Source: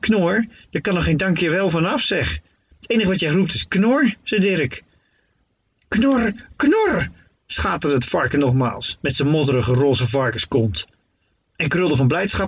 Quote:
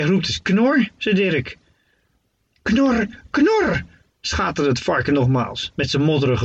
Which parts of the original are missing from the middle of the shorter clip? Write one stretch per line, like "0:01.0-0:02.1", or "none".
none